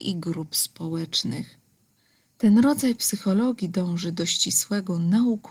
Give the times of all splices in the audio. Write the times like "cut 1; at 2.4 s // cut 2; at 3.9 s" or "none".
none